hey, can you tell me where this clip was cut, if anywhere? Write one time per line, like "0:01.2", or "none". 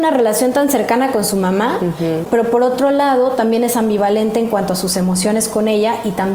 0:02.2